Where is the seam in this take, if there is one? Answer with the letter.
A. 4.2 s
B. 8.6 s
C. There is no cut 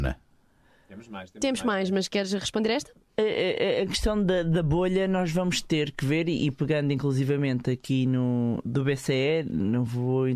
B